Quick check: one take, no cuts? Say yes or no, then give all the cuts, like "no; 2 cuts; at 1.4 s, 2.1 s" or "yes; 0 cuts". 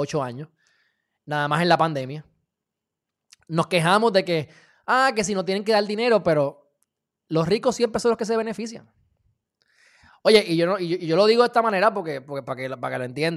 yes; 0 cuts